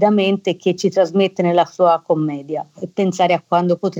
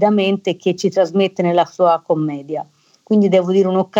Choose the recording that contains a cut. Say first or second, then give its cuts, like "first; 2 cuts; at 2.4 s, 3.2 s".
first; 1 cut; at 2.8 s